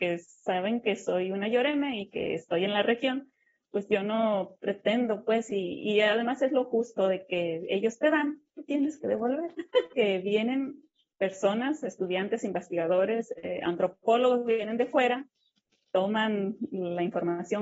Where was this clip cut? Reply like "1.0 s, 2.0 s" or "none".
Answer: 9.9 s